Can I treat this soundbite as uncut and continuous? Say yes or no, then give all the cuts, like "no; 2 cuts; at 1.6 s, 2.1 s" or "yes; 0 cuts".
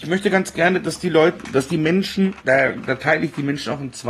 no; 1 cut; at 2.4 s